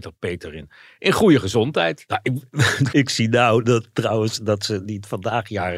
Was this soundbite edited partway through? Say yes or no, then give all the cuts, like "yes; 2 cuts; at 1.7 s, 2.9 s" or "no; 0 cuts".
yes; 1 cut; at 2.9 s